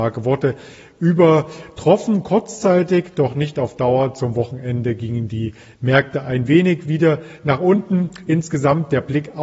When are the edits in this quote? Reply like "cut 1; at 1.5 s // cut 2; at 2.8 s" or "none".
none